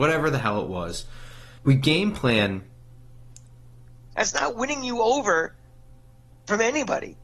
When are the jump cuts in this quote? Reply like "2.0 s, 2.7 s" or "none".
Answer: 1.6 s, 4.1 s